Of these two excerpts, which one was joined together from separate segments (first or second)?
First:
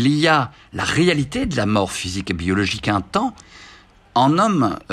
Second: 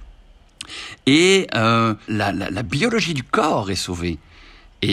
second